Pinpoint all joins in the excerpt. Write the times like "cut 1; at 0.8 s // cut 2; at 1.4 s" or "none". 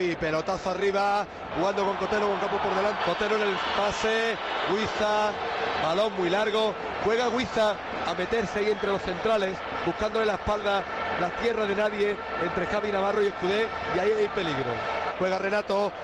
cut 1; at 1.5 s // cut 2; at 3.0 s // cut 3; at 15.1 s